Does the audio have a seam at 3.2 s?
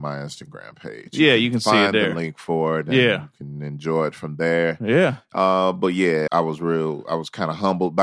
no; 1 cut; at 6.3 s

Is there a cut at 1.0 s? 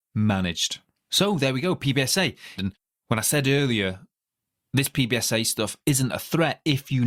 no; 1 cut; at 2.6 s

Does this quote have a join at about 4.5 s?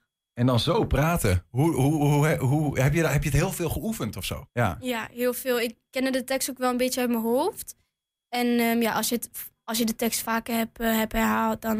yes; 1 cut; at 4.5 s

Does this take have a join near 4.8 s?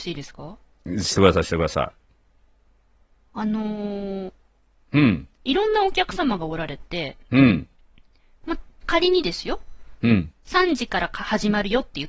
yes; 1 cut; at 4.8 s

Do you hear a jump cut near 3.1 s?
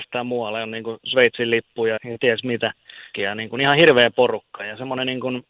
yes; 2 cuts; at 2.0 s, 3.1 s

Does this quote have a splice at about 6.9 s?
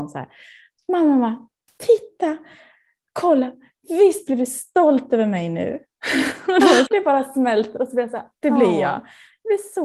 yes; 2 cuts; at 6.9 s, 8.3 s

